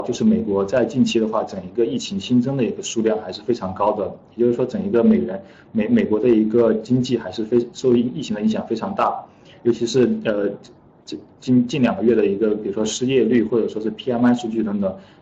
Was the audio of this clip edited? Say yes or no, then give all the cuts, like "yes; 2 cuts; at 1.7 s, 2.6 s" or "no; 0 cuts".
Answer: no; 0 cuts